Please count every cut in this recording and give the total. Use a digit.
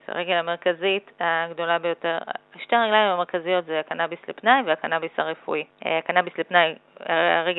1